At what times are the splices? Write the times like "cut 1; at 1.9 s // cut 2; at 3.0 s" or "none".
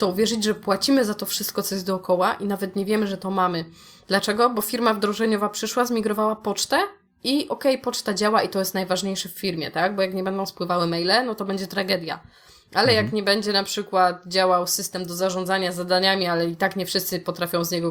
none

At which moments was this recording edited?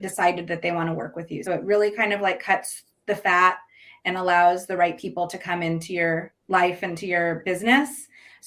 cut 1; at 1.5 s // cut 2; at 6.4 s

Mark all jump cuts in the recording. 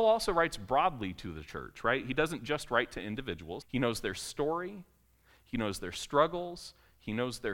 cut 1; at 3.6 s

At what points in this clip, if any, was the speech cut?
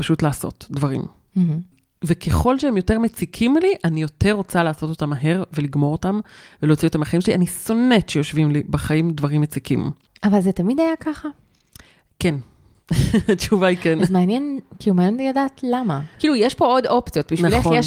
cut 1; at 10.1 s // cut 2; at 16.1 s

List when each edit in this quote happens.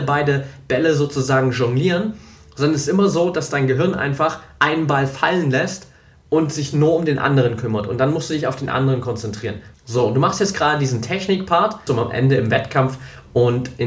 cut 1; at 9.7 s // cut 2; at 11.9 s

